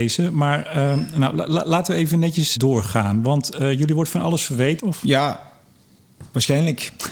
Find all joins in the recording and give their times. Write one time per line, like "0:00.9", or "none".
0:02.6
0:04.8